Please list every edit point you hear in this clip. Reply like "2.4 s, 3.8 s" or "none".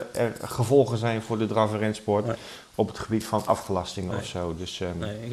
none